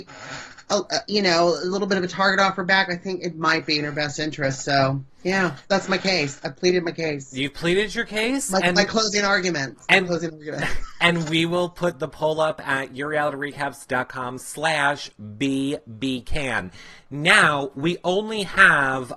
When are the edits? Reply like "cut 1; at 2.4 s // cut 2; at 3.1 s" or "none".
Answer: cut 1; at 5.6 s